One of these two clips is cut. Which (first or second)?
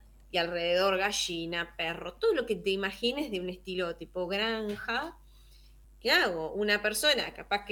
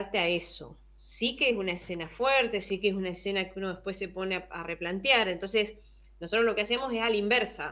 first